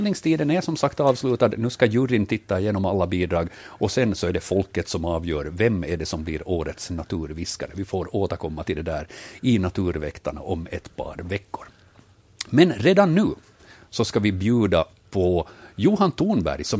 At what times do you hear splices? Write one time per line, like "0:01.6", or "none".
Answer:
none

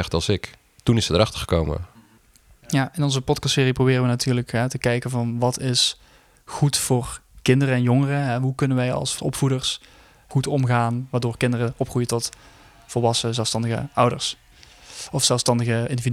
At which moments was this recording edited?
none

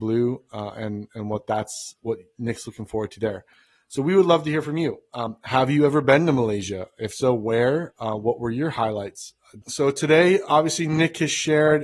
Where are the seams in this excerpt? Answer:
0:09.6

